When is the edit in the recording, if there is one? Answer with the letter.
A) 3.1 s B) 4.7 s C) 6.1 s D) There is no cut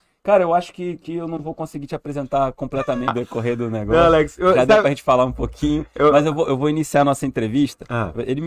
A